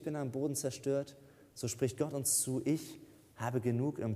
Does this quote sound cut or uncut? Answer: uncut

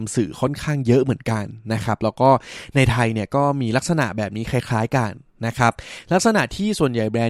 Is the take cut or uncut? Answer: uncut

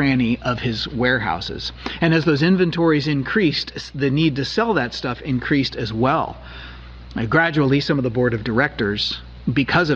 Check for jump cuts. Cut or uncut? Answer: uncut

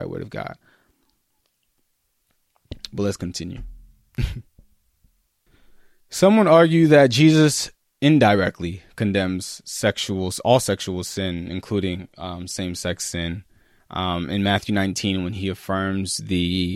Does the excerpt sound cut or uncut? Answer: uncut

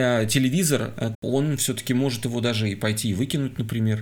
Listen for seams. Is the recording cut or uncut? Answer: cut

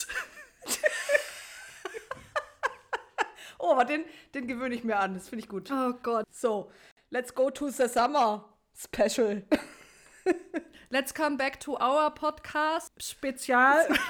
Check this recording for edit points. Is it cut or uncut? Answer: uncut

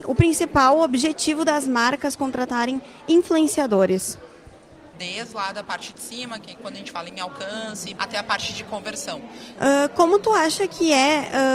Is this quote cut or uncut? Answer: cut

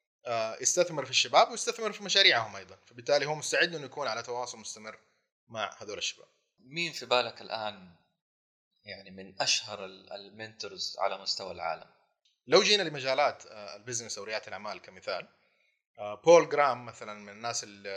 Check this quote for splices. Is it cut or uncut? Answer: uncut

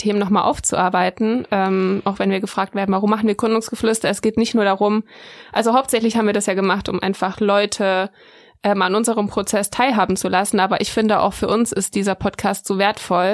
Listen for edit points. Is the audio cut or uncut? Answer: uncut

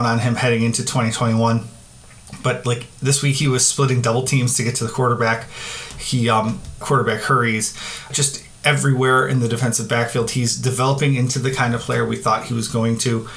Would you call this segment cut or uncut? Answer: cut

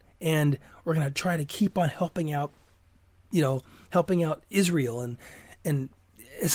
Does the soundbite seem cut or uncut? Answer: uncut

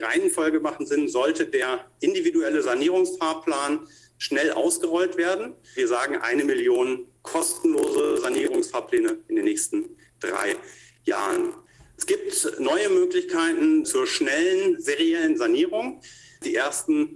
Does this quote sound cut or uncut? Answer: cut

